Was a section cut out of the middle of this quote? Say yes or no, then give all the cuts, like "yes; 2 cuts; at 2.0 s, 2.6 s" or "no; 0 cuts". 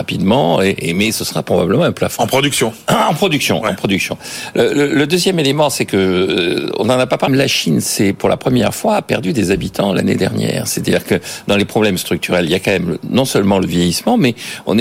yes; 1 cut; at 7.3 s